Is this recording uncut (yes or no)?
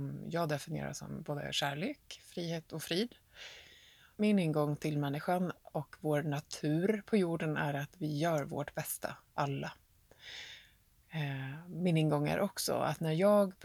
no